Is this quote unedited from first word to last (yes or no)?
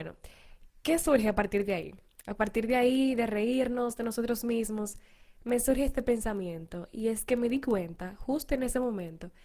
yes